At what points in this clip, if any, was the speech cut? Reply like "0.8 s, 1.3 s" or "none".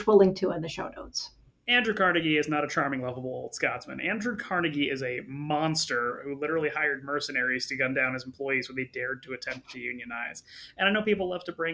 1.5 s